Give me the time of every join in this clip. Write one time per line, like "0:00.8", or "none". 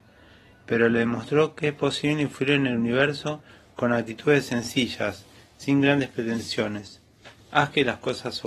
0:07.5